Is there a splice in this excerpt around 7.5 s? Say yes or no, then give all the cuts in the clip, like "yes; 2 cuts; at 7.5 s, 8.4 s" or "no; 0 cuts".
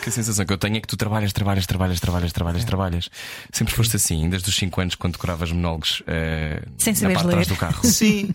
no; 0 cuts